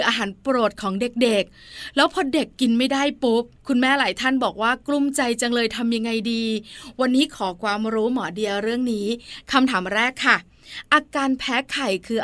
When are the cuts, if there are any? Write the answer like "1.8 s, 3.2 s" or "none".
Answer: none